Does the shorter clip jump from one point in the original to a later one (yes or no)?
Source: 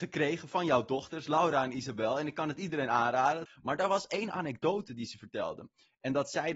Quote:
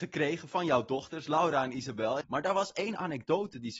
yes